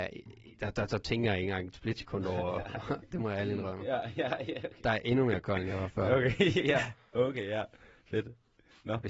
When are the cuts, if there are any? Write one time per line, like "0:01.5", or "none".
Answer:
0:03.1